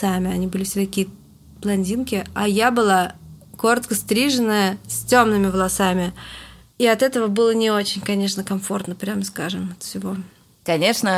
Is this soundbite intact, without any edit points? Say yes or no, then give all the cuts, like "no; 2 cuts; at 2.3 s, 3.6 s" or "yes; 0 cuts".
yes; 0 cuts